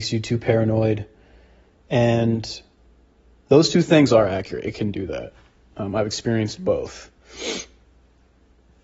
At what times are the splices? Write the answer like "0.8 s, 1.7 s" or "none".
none